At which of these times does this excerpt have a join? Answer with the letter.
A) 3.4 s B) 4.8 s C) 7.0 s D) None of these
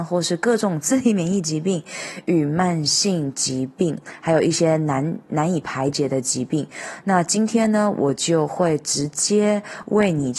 D